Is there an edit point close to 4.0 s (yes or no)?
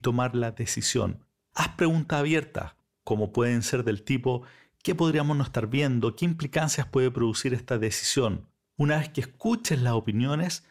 no